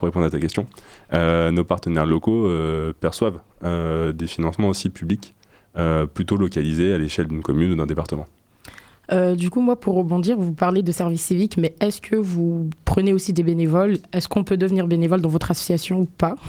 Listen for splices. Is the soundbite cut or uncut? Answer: uncut